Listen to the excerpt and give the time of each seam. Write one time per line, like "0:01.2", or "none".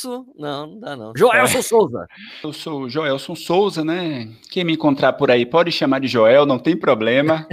0:01.2
0:02.4